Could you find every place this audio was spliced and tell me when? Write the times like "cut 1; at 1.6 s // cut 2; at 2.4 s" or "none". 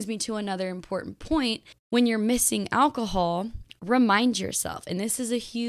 none